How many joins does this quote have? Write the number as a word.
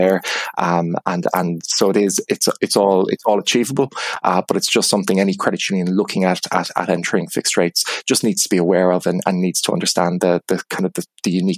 zero